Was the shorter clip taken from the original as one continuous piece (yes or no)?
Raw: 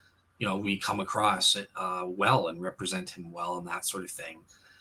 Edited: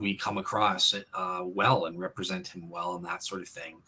yes